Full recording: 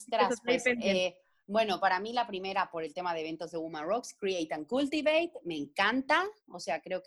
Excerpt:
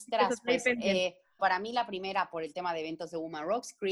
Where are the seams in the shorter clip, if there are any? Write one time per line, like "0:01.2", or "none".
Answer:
0:01.4